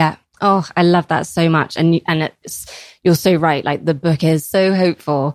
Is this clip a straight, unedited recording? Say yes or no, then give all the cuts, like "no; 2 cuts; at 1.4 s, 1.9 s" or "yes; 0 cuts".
yes; 0 cuts